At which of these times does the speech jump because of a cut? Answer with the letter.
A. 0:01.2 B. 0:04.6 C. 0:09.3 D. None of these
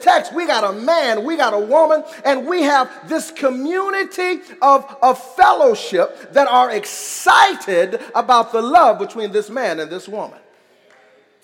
D